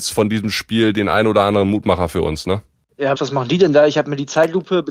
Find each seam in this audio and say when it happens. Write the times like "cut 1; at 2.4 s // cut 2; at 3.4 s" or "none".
cut 1; at 3.1 s